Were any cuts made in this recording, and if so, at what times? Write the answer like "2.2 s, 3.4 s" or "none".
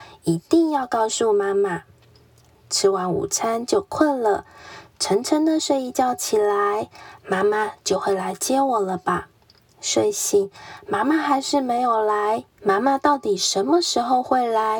12.6 s